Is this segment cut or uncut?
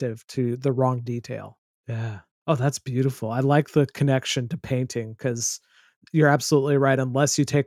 cut